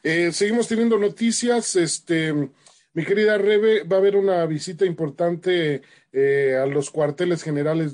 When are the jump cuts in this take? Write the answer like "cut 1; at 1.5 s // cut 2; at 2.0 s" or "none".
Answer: none